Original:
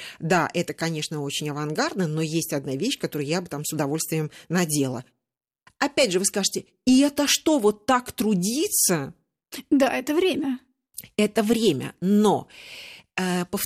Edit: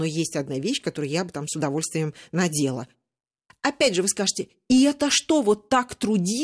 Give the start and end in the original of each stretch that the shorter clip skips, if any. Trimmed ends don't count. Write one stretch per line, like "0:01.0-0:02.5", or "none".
none